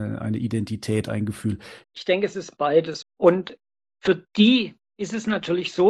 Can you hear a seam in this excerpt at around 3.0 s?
yes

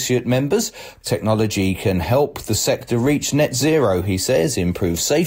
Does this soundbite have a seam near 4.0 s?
no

